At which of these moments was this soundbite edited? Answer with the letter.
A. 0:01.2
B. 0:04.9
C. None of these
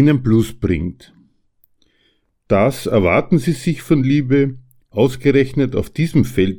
B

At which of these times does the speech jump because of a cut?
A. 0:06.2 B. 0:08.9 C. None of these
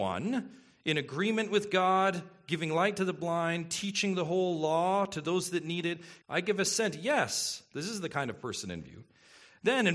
A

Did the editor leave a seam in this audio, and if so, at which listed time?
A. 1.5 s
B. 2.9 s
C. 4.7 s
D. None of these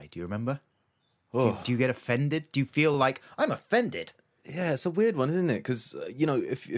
D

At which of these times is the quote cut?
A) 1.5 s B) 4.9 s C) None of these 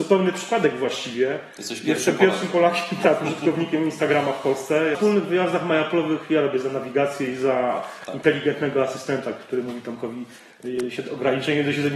B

